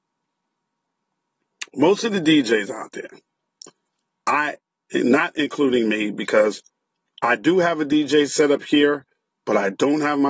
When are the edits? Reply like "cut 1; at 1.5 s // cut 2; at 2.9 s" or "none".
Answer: none